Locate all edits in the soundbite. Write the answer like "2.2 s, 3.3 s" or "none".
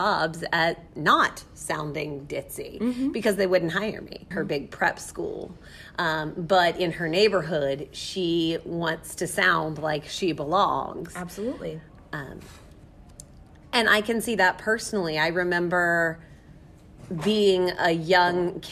4.3 s